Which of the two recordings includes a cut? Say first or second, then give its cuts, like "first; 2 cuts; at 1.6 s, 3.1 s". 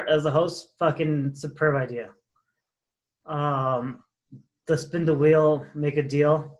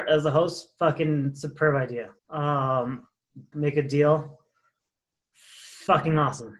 second; 2 cuts; at 2.2 s, 3.5 s